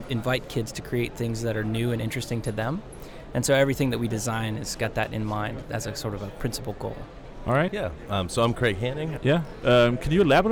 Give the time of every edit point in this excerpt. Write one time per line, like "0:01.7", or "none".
0:07.7
0:09.2